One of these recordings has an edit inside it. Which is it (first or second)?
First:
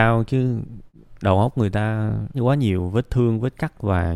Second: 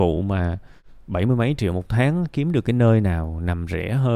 first